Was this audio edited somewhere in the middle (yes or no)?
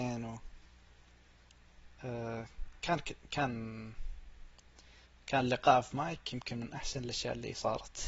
no